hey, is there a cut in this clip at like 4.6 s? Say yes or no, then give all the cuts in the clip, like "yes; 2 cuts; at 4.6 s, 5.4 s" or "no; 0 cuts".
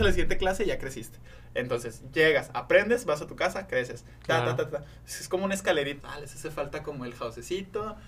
no; 1 cut; at 6.0 s